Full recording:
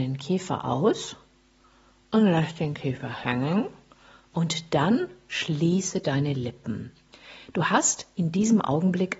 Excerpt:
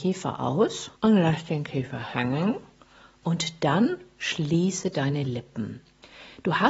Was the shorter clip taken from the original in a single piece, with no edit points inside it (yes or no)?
no